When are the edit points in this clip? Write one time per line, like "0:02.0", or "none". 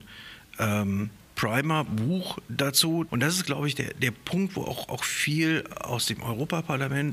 0:03.1